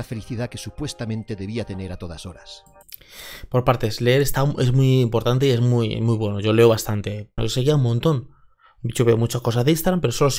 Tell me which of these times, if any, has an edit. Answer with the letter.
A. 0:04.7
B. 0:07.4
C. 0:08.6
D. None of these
B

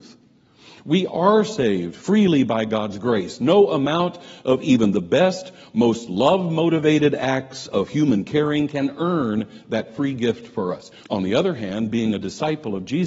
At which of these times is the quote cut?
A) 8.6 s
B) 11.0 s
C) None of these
B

